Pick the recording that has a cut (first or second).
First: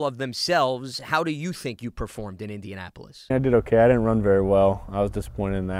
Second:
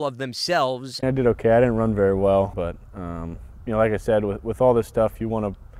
second